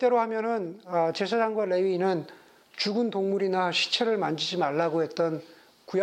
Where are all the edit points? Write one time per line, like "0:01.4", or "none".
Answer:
none